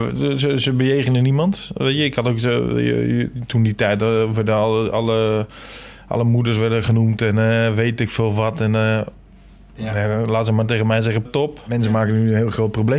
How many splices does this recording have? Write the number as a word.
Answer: one